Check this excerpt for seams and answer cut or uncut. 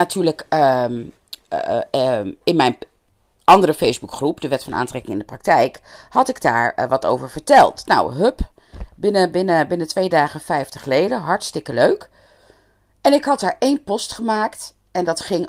uncut